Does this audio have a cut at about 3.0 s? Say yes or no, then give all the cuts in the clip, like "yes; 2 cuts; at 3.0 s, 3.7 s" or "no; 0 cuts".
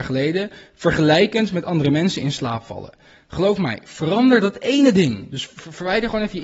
no; 0 cuts